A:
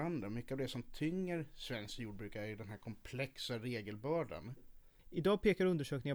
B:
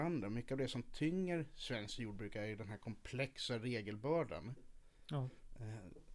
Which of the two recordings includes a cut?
A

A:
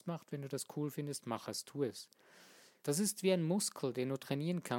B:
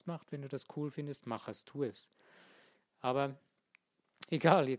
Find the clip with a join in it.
A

